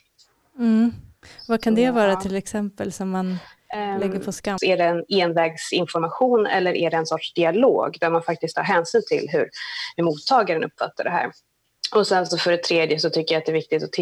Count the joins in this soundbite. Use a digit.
1